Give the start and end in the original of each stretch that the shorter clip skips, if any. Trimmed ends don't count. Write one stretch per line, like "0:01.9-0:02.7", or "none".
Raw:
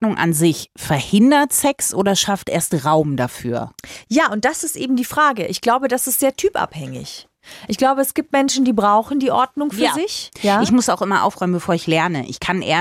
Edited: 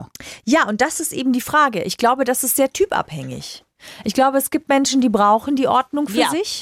none